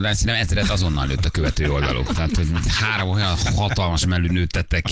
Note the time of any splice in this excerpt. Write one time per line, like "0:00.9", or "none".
none